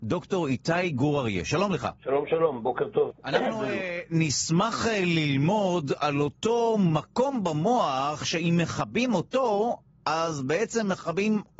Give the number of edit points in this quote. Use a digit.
1